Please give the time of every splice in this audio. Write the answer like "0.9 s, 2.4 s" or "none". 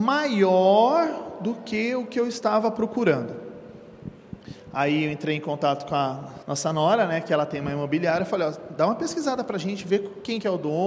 6.4 s